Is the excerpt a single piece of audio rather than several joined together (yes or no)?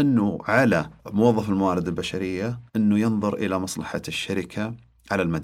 no